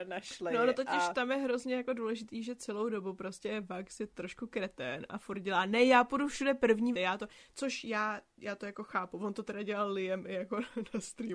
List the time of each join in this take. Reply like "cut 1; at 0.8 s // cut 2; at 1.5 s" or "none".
cut 1; at 6.9 s